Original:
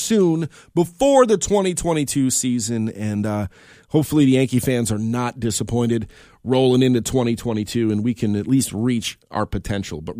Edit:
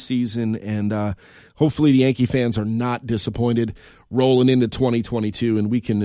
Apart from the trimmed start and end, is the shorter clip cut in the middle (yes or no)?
no